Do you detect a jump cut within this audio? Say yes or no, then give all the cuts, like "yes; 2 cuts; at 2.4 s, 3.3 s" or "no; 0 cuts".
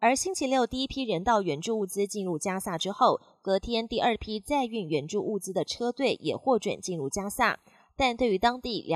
no; 0 cuts